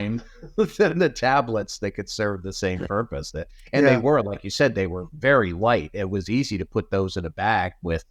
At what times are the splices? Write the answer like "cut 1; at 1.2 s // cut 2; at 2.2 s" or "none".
none